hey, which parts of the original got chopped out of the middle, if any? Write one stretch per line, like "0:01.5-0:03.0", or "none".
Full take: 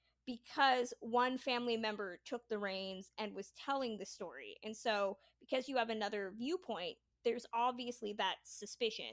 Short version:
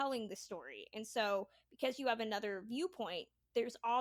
none